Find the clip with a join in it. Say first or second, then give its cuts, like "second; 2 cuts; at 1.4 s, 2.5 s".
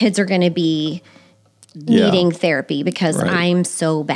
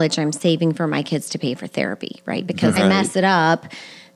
second; 1 cut; at 2.8 s